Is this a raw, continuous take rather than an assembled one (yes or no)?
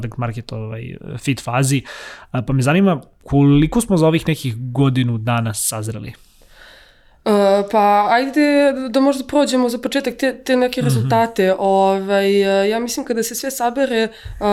yes